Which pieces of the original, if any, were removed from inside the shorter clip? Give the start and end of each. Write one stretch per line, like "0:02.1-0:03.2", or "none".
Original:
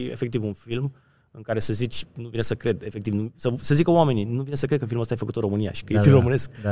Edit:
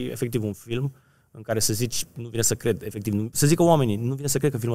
0:03.3-0:03.6